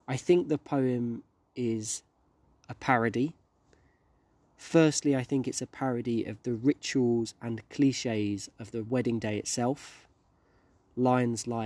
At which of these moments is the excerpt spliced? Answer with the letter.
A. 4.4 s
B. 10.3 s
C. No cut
C